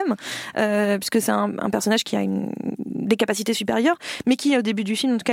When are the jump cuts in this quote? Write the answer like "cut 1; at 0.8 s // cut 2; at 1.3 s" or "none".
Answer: none

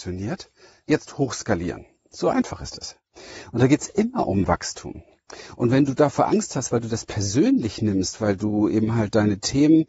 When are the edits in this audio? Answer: none

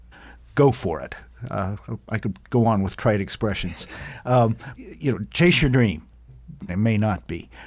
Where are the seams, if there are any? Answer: cut 1; at 4.7 s // cut 2; at 6.7 s

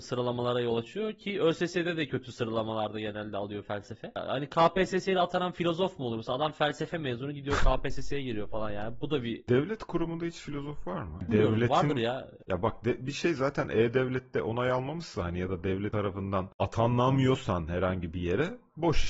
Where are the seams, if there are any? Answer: none

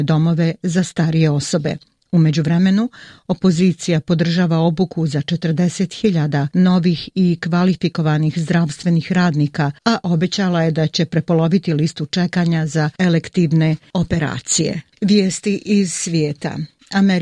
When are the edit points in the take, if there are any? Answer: cut 1; at 9.8 s

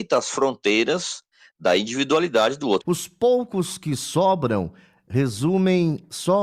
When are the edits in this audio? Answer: cut 1; at 2.8 s

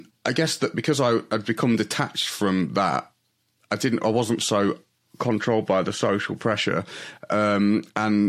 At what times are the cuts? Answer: none

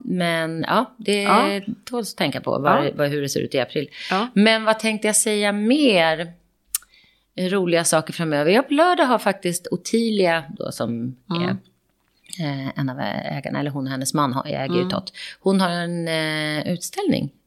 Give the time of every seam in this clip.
none

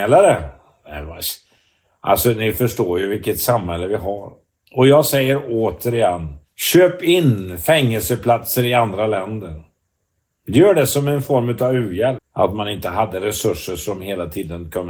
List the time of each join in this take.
cut 1; at 6.5 s // cut 2; at 12.2 s

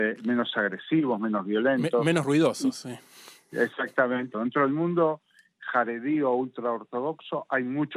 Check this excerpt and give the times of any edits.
cut 1; at 4.3 s

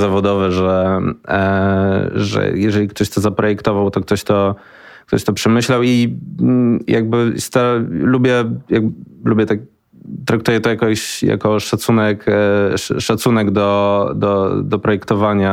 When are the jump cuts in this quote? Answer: none

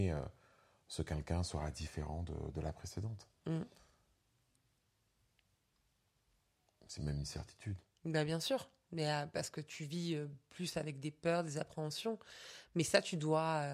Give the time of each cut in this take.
none

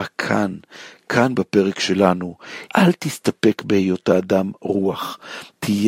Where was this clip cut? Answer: cut 1; at 2.7 s

